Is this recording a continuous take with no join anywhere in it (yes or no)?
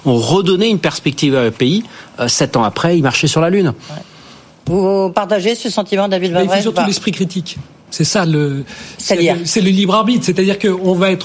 yes